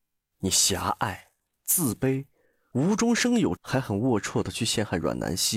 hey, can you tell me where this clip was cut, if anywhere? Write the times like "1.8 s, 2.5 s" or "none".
3.6 s